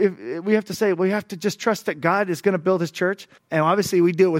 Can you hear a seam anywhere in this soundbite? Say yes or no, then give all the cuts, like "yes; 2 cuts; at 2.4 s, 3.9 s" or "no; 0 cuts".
yes; 1 cut; at 3.4 s